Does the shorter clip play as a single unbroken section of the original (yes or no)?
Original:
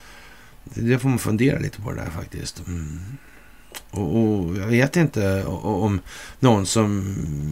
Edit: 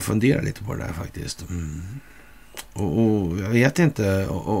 yes